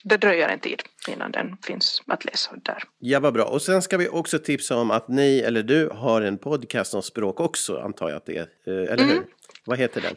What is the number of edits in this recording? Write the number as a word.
one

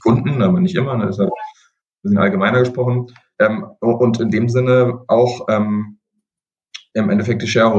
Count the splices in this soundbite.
zero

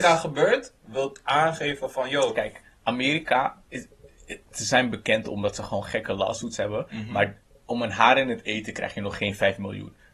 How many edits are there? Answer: zero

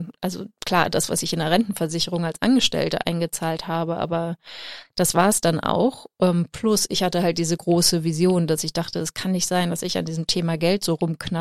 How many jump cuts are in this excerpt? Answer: zero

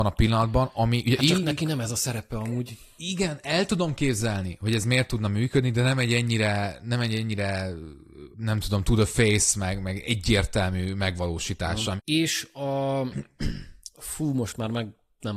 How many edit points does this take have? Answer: two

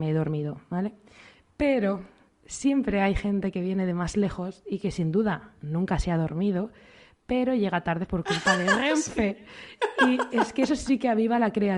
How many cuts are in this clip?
zero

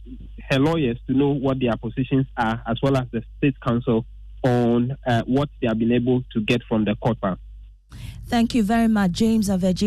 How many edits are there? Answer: one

